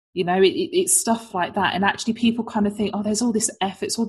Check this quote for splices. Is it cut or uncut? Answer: uncut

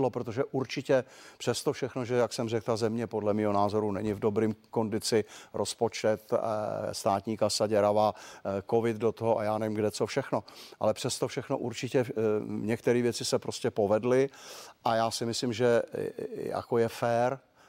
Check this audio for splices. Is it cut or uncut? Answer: uncut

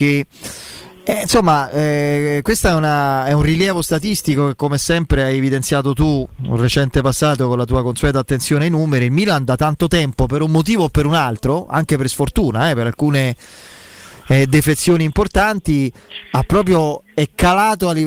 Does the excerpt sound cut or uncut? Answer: uncut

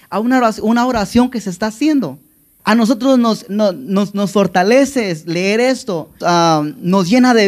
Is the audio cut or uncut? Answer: cut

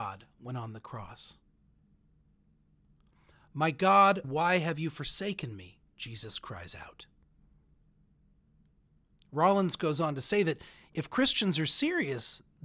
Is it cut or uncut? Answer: cut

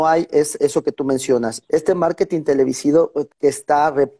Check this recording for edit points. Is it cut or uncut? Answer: cut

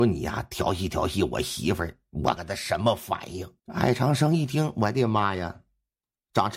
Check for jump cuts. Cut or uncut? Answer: cut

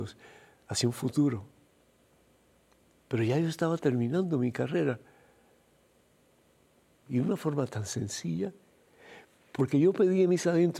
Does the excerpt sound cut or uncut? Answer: cut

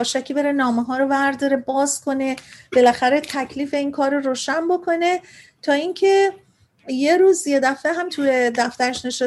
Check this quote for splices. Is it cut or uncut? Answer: cut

